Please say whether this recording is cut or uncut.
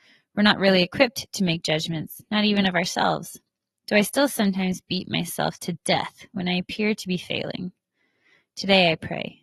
uncut